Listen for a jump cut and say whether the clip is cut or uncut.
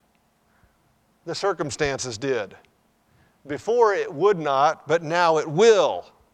uncut